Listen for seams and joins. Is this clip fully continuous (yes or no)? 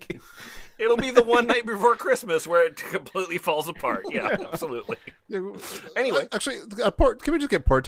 yes